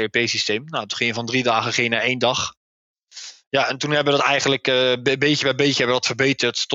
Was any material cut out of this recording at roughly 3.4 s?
no; 0 cuts

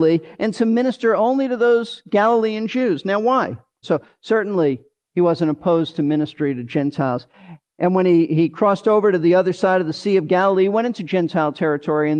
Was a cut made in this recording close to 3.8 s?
yes; 1 cut; at 3.8 s

